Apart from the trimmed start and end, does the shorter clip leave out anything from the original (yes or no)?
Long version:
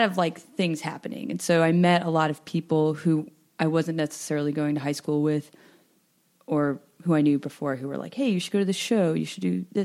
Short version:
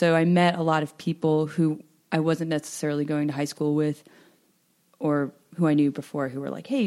no